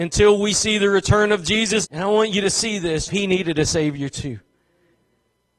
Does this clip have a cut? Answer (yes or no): yes